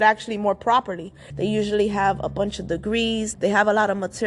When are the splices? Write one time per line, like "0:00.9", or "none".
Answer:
0:01.3
0:03.3